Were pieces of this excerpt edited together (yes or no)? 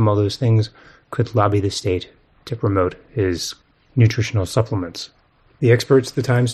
yes